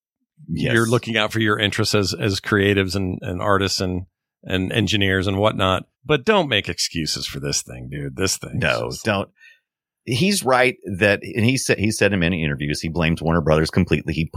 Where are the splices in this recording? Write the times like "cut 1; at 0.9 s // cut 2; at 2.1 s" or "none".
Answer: cut 1; at 5.9 s

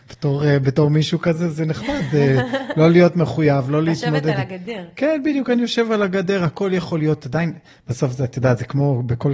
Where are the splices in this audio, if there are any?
none

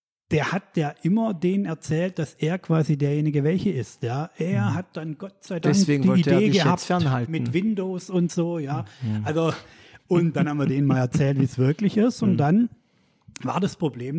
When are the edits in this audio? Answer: none

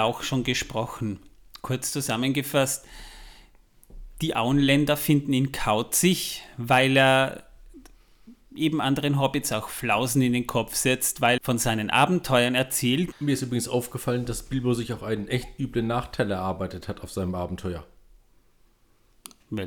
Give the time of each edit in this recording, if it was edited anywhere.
cut 1; at 11.4 s // cut 2; at 13.1 s

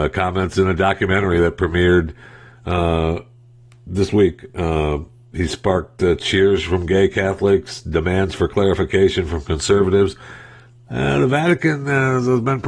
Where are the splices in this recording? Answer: none

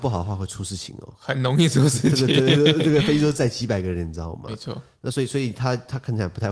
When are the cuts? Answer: none

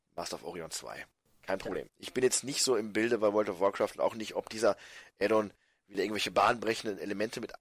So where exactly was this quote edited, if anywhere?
cut 1; at 1.9 s

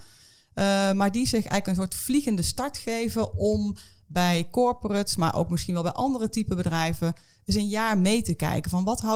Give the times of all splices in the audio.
none

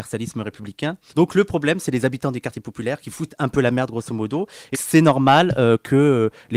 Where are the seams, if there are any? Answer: cut 1; at 1.1 s // cut 2; at 4.7 s

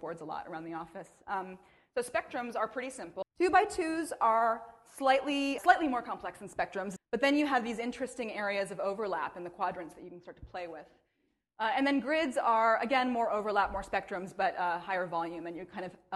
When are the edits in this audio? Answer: cut 1; at 3.2 s // cut 2; at 5.6 s // cut 3; at 7.0 s

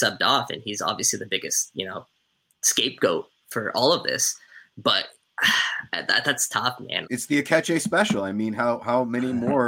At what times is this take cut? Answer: cut 1; at 7.0 s

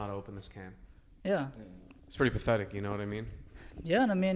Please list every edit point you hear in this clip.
none

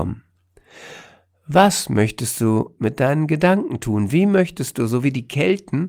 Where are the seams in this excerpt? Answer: none

